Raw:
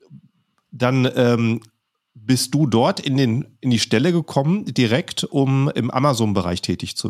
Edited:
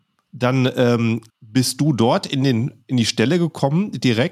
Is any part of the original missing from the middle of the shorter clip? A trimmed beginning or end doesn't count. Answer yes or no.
yes